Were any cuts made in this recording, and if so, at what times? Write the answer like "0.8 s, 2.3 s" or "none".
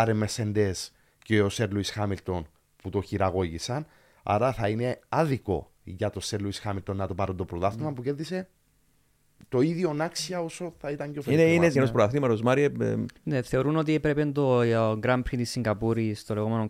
11.7 s, 13.2 s